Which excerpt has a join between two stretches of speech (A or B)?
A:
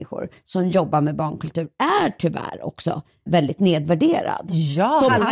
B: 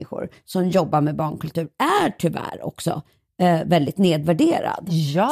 A